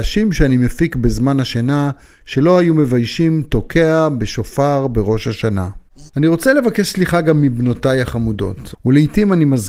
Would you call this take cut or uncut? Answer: cut